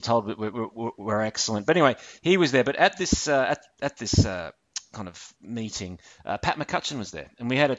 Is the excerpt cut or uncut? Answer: uncut